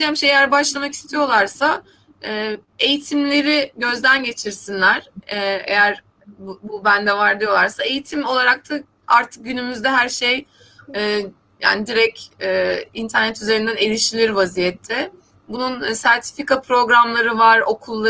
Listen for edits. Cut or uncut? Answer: uncut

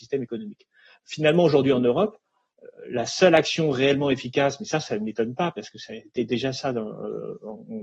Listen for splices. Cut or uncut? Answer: uncut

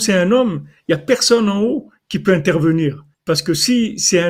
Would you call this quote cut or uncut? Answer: cut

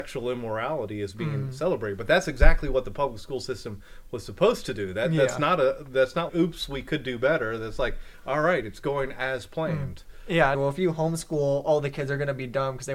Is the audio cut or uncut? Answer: cut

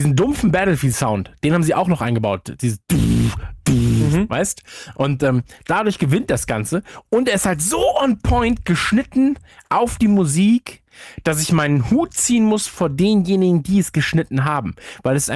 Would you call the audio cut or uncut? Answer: uncut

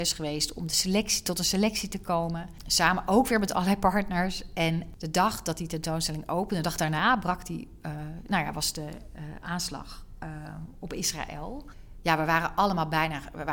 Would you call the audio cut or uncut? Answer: uncut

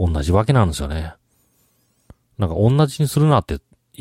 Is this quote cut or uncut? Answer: uncut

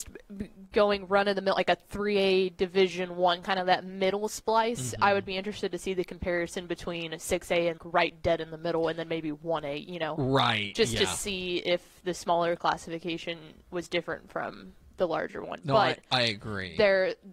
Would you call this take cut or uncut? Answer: cut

